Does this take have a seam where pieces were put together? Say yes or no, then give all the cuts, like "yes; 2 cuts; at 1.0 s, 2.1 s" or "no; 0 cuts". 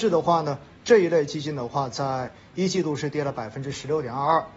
no; 0 cuts